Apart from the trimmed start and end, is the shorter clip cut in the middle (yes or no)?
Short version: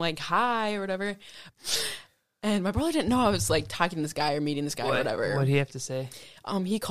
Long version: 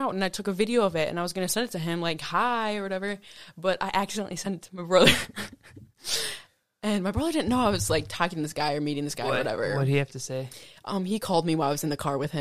yes